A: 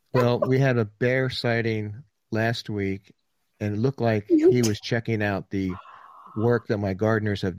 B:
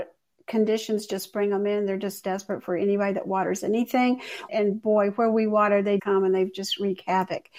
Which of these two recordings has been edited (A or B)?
B